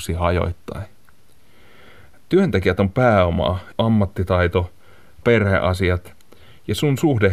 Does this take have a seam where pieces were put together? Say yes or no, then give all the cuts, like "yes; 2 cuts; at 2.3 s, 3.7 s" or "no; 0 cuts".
yes; 2 cuts; at 3.7 s, 5.2 s